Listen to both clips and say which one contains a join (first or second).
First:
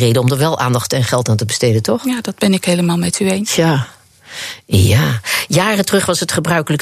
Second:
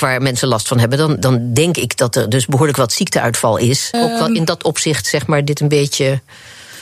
second